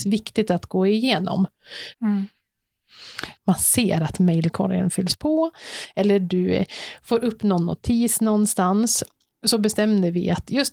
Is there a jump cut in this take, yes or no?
yes